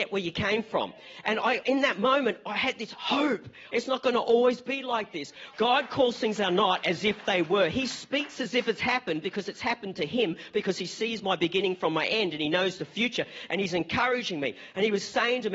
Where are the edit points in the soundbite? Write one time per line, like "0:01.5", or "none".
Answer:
0:01.6
0:03.7
0:05.5